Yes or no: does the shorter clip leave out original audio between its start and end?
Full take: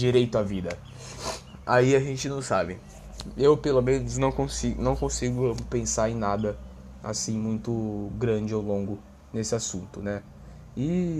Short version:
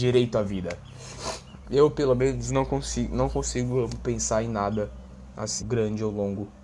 yes